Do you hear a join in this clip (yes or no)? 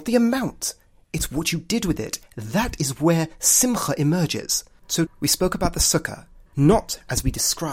yes